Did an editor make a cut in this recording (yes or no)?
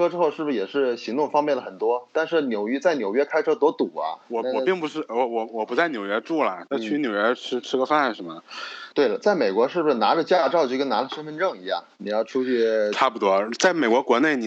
yes